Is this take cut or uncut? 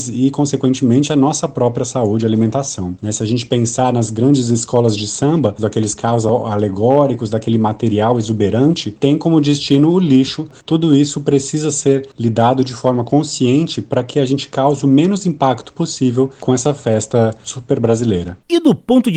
cut